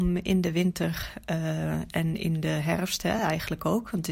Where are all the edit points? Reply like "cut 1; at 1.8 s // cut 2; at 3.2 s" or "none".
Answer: none